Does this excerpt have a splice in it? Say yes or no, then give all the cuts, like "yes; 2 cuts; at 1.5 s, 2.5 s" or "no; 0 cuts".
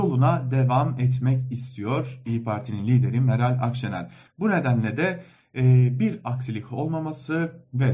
no; 0 cuts